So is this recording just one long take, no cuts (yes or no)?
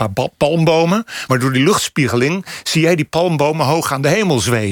yes